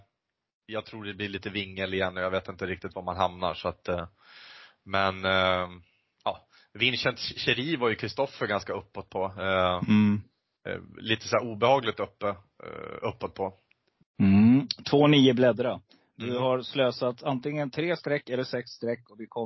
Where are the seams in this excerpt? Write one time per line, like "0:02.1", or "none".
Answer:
0:14.0